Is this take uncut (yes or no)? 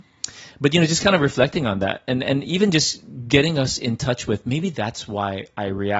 yes